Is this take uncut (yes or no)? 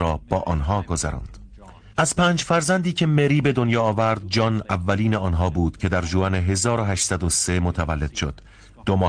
no